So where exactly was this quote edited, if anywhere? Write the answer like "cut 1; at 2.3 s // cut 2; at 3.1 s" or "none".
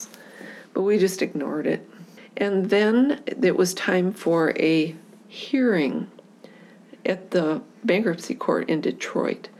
cut 1; at 2.2 s